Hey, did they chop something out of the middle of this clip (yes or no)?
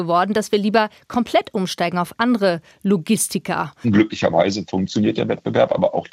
yes